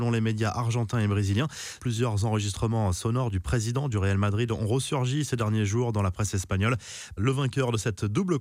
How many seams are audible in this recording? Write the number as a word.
two